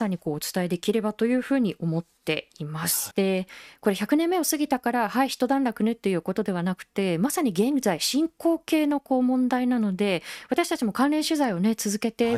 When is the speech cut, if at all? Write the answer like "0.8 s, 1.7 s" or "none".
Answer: 3.1 s